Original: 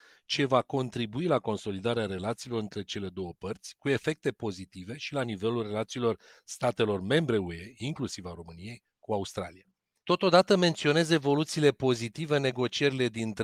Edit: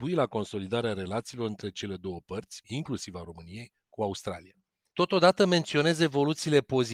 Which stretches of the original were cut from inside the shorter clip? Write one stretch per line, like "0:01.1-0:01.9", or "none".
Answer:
0:03.8-0:07.7